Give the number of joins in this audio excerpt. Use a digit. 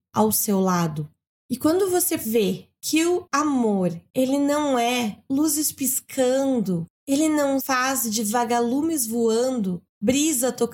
0